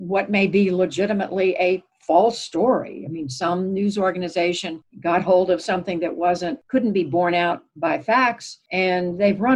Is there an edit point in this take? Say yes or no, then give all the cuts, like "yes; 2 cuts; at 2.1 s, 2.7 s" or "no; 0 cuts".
no; 0 cuts